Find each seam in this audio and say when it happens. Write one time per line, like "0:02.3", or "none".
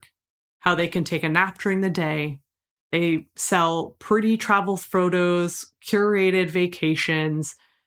none